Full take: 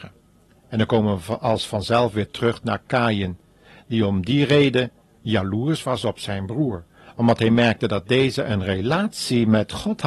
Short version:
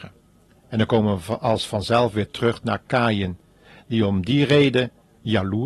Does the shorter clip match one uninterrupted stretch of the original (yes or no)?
yes